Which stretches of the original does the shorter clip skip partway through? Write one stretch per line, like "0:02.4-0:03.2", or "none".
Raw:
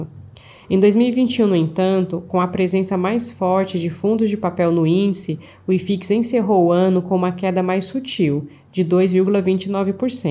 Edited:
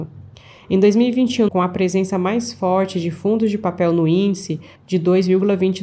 0:01.5-0:02.3
0:05.5-0:08.6